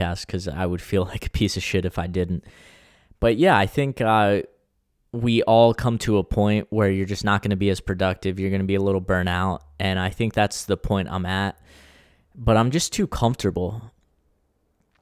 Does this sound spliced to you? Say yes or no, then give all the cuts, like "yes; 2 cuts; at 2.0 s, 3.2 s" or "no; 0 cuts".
no; 0 cuts